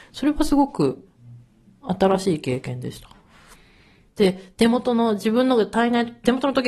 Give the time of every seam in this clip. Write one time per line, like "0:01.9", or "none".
0:04.1